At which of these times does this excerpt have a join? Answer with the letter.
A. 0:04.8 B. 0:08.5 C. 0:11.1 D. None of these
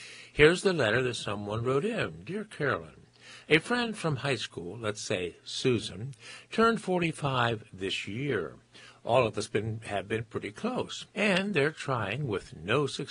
C